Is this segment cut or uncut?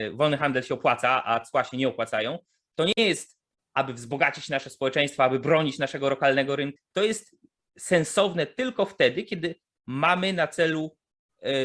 cut